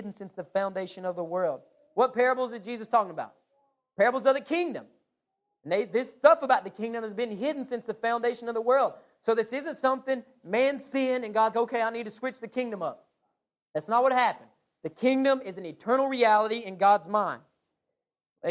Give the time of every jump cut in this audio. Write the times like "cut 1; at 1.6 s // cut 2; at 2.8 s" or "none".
cut 1; at 11.5 s